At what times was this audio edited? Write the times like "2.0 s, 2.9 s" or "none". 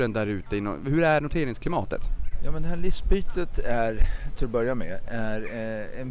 none